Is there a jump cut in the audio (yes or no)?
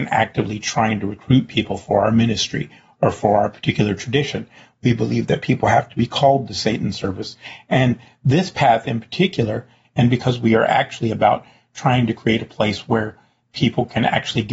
yes